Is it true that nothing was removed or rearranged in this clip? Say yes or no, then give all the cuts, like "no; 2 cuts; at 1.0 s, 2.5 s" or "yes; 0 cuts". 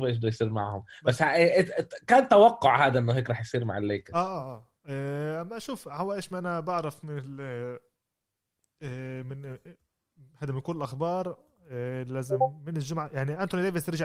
yes; 0 cuts